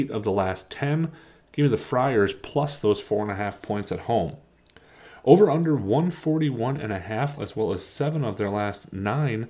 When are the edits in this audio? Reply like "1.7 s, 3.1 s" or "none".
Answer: 7.4 s